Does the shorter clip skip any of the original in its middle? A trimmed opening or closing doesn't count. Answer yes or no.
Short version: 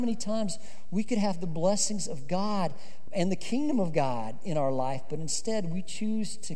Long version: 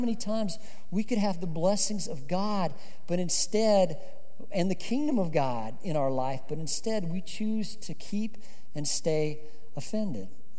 yes